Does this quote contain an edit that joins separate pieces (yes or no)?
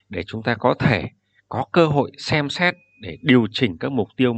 no